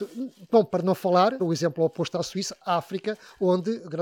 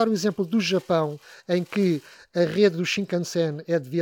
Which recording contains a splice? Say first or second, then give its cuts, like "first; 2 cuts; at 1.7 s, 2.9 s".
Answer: first; 1 cut; at 1.4 s